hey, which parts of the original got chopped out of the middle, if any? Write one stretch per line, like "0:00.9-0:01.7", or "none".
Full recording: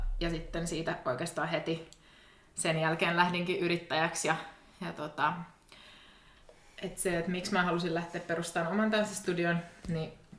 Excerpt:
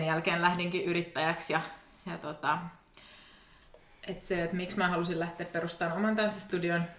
none